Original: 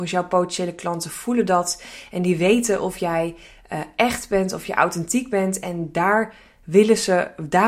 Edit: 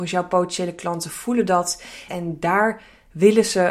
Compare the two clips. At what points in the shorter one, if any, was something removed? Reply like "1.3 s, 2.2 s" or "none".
2.1 s

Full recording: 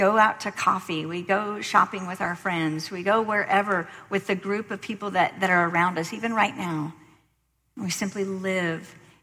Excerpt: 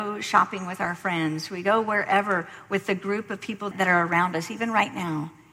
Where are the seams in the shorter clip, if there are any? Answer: 3.7 s

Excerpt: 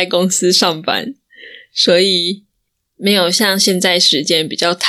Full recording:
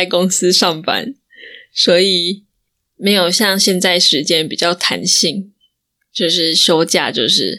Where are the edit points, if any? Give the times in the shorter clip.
none

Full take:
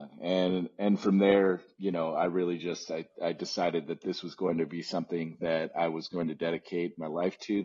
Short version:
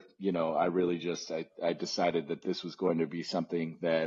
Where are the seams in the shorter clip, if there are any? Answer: none

